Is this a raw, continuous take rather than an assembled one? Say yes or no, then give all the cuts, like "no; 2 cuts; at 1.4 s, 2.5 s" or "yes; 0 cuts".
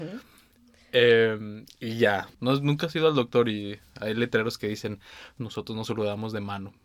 no; 2 cuts; at 2.3 s, 5.4 s